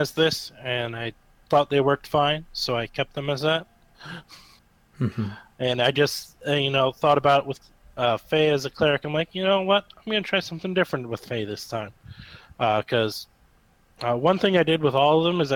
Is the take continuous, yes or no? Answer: yes